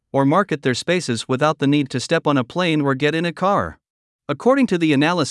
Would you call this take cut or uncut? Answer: cut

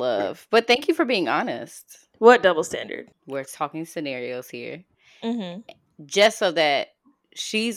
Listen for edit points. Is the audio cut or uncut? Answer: cut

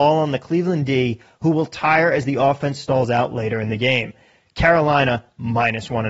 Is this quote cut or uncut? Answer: uncut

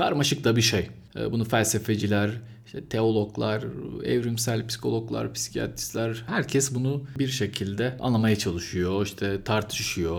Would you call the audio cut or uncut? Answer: uncut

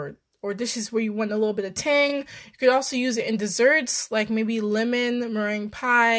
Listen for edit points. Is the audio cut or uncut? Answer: uncut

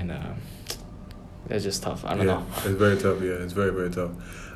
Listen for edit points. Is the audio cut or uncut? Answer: uncut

